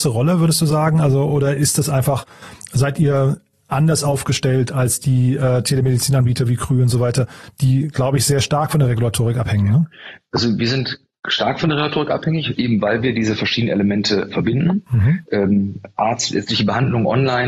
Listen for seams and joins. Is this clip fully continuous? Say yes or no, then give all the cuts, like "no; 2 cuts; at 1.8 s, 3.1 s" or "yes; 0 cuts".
yes; 0 cuts